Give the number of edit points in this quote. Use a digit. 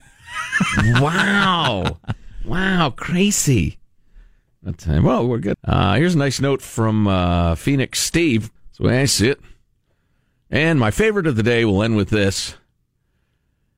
2